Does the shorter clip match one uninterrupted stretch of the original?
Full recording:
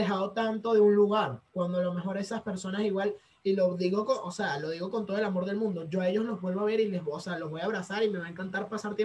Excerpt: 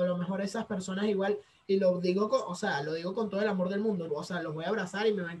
no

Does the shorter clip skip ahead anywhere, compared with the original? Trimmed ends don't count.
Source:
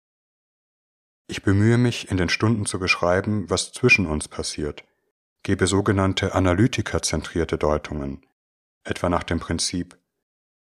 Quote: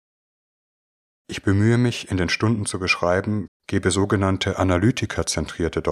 yes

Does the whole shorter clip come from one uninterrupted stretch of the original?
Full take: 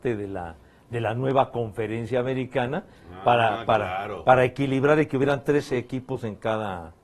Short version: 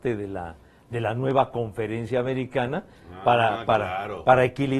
yes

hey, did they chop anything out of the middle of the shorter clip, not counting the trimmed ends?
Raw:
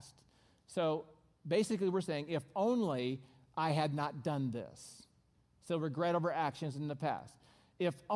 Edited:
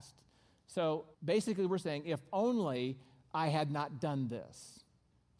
yes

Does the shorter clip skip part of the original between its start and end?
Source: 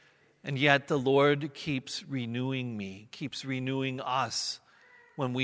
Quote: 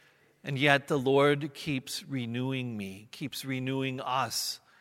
no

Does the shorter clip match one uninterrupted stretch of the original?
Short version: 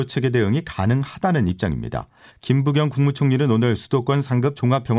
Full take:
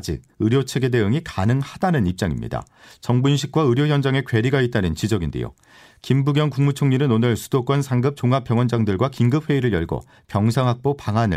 no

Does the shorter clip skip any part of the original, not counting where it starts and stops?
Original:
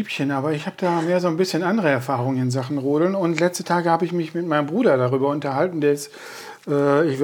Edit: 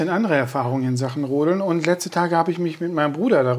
no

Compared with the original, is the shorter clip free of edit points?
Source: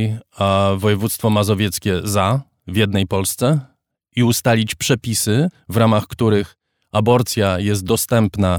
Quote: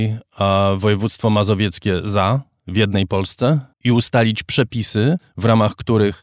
no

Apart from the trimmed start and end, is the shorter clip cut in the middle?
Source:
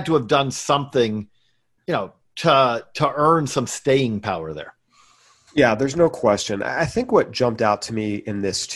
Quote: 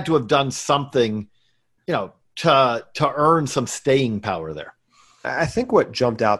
yes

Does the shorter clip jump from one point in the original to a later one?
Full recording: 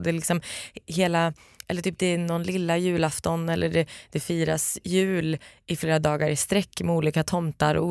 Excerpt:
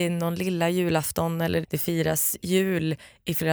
yes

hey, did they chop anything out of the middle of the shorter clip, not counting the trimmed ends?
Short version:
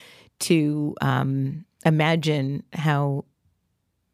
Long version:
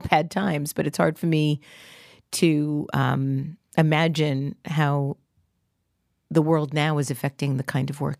no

